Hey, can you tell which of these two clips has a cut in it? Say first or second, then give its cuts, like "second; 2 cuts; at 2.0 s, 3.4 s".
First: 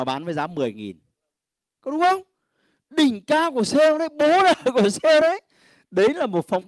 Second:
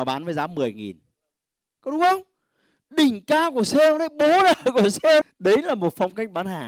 second; 1 cut; at 5.2 s